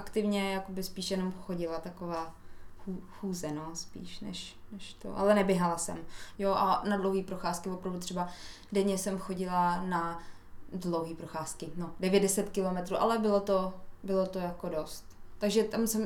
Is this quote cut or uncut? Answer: cut